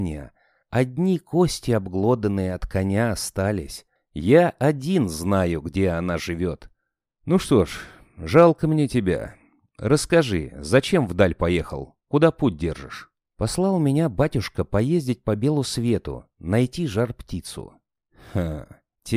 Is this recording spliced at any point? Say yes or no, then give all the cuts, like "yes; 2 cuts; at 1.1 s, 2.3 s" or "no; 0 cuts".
yes; 2 cuts; at 4.0 s, 7.1 s